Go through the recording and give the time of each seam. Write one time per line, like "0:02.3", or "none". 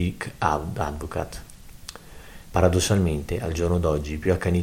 0:02.4